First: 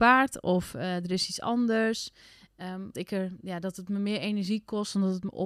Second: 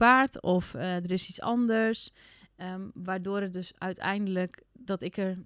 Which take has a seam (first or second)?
first